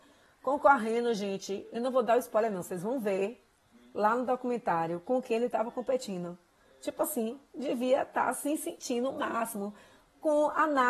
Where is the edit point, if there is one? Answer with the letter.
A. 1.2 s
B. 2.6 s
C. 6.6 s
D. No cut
D